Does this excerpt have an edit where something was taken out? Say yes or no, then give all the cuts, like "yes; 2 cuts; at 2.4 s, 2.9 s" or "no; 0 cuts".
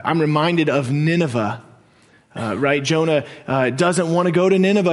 no; 0 cuts